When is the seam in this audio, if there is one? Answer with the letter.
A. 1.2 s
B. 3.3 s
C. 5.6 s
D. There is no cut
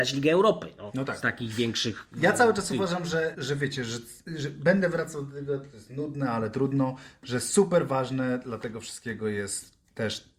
B